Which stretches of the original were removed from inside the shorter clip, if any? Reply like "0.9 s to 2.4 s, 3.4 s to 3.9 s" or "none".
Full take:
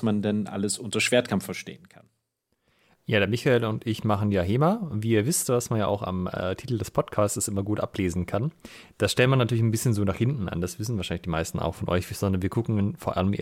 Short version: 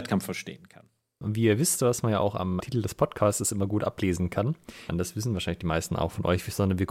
2.4 s to 4.9 s, 6.3 s to 6.6 s, 8.9 s to 10.5 s